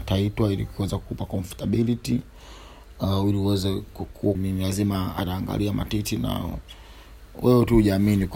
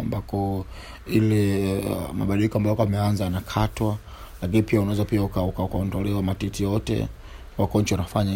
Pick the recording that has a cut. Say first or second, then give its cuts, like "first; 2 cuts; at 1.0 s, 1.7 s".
first; 1 cut; at 4.3 s